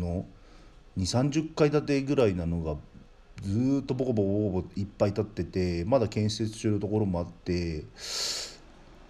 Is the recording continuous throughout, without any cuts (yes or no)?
yes